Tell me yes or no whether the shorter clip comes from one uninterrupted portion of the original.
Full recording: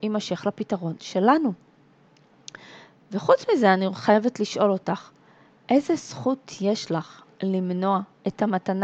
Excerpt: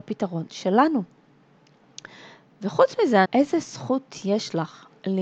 no